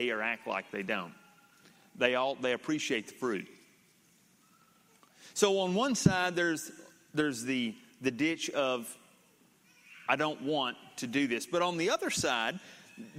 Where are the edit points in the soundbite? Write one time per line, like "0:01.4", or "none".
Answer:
none